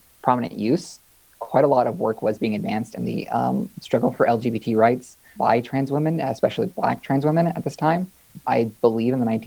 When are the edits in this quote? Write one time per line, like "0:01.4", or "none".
0:08.4